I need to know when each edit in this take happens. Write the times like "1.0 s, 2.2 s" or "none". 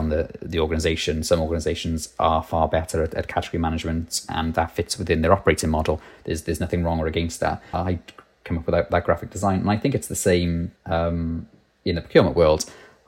7.7 s, 10.8 s